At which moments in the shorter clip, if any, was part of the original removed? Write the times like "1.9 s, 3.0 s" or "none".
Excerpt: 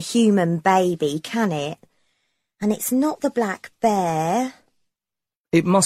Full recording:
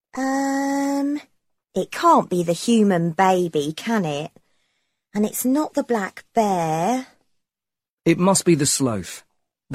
none